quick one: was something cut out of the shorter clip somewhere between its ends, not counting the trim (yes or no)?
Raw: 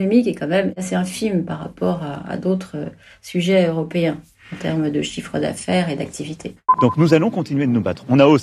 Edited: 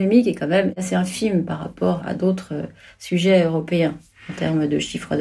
yes